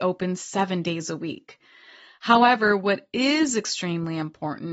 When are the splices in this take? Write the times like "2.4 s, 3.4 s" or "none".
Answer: none